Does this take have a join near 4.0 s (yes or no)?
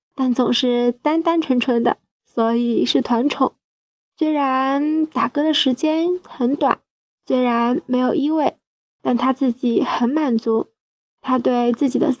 yes